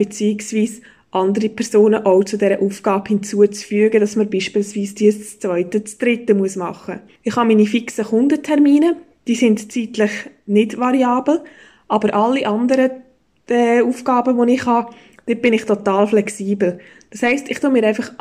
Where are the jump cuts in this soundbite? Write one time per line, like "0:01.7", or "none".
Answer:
0:07.1